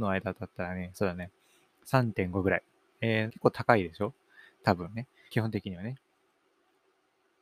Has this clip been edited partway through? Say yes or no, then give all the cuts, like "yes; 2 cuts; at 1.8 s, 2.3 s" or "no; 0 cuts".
yes; 3 cuts; at 0.9 s, 3.3 s, 5.3 s